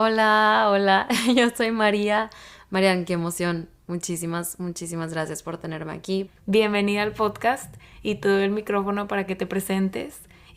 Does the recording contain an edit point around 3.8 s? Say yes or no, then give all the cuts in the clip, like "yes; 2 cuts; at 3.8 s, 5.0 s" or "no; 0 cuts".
no; 1 cut; at 6.3 s